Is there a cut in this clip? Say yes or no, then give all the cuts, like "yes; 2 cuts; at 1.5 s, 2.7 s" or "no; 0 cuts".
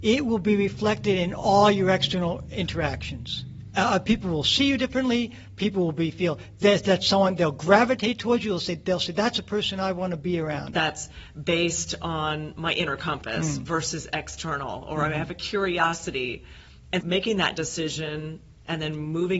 yes; 2 cuts; at 10.7 s, 17.0 s